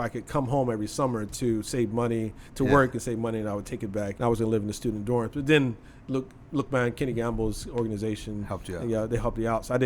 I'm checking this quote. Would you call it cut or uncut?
cut